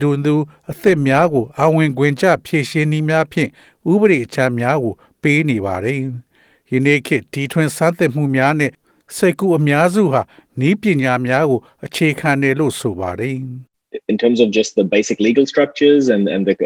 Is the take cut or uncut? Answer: uncut